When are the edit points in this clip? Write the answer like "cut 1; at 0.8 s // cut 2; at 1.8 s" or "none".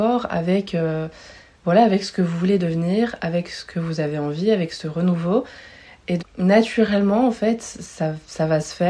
cut 1; at 6.2 s